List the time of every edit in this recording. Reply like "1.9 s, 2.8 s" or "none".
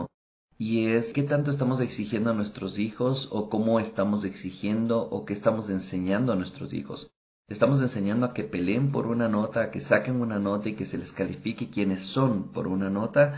1.1 s